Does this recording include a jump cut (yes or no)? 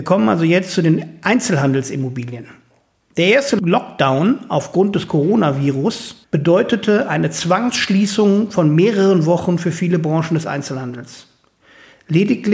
no